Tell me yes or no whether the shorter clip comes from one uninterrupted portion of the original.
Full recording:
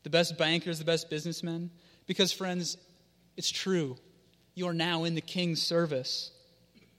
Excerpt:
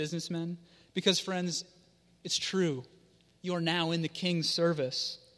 yes